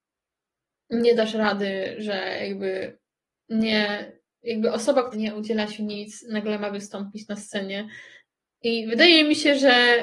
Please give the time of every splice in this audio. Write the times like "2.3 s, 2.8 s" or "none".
5.1 s